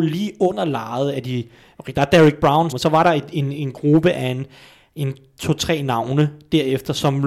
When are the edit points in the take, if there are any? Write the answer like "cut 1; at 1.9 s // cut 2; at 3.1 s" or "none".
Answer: cut 1; at 2.7 s